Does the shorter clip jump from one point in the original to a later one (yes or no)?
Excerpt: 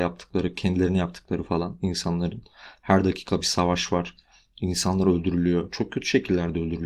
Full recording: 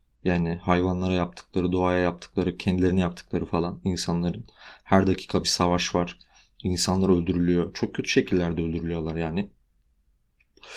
no